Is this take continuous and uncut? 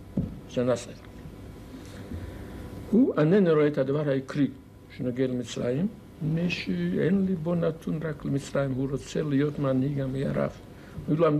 yes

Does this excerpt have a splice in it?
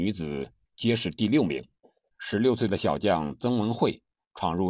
yes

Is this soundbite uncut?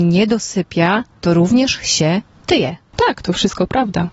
yes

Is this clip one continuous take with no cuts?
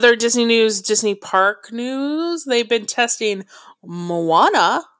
yes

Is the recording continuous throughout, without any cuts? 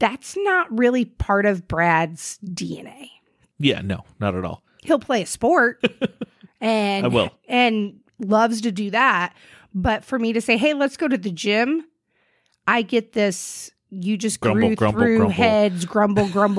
yes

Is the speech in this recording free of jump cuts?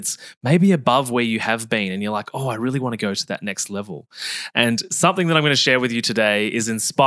no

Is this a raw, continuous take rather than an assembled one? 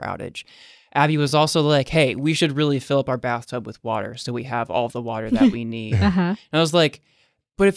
yes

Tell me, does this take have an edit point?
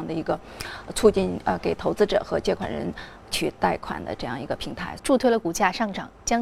yes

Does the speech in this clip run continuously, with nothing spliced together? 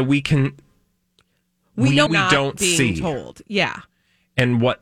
no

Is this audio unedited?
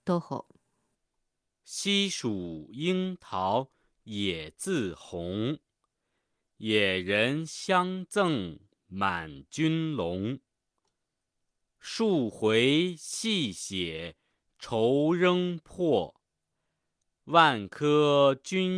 yes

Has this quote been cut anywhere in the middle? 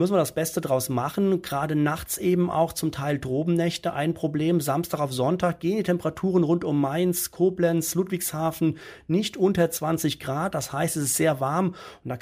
no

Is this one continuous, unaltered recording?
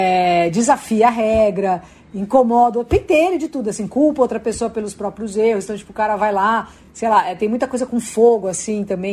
yes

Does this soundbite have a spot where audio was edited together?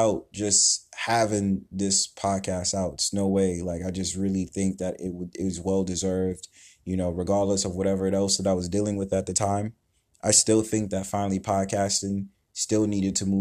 no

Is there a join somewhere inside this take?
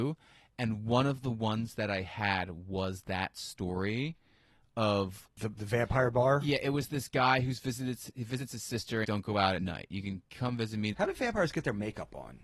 yes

